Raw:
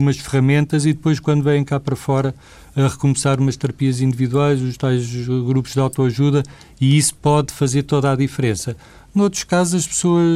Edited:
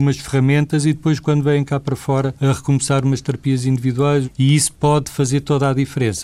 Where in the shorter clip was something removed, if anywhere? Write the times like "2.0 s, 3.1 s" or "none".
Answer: 2.4 s, 4.2 s